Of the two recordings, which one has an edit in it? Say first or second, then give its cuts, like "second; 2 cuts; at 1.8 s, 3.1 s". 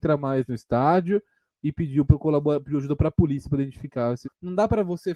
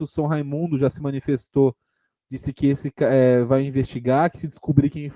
first; 1 cut; at 4.2 s